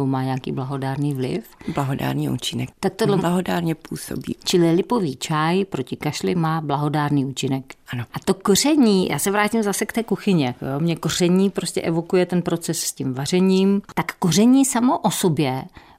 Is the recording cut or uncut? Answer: cut